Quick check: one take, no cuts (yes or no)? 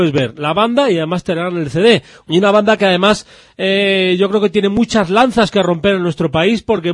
no